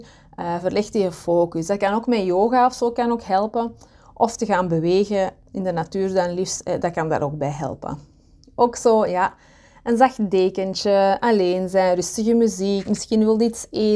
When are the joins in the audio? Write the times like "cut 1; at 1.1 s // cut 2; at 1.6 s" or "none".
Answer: cut 1; at 12.9 s

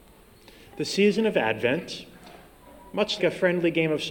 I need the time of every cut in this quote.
cut 1; at 3.2 s

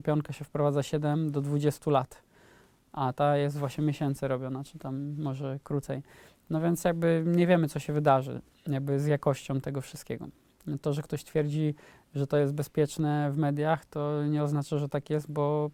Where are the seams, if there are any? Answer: none

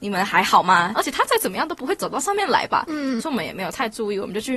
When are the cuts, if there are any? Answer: cut 1; at 0.9 s // cut 2; at 3.2 s

